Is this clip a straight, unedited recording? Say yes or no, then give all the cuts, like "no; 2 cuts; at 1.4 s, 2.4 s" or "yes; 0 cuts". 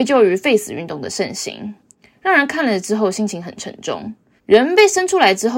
no; 1 cut; at 4.4 s